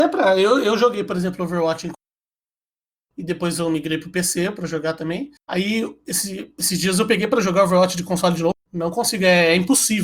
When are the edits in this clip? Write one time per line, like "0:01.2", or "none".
0:05.4